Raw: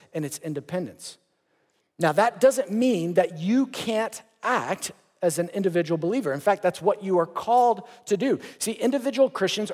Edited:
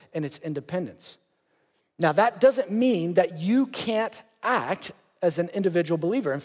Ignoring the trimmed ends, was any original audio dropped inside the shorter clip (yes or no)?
no